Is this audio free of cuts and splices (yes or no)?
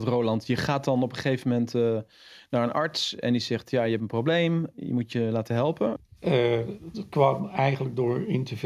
no